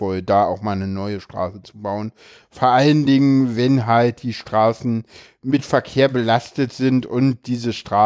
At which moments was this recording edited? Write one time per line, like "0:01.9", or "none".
none

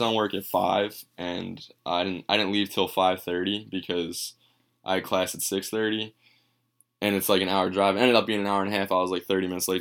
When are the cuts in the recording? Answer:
none

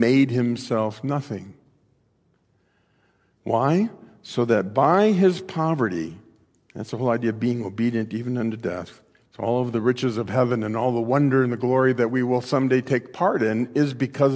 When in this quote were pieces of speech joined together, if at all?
0:09.3

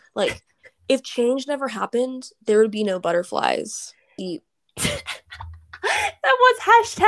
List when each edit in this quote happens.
0:04.2

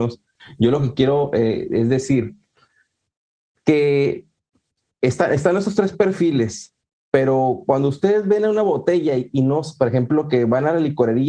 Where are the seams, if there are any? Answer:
none

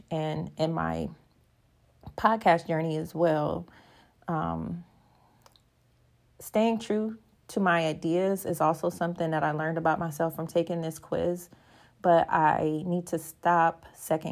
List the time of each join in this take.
none

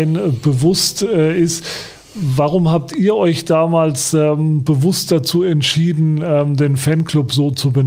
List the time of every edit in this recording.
none

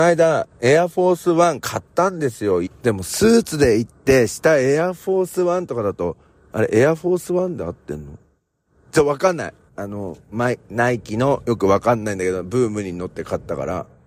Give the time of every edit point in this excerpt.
0:02.7
0:09.7

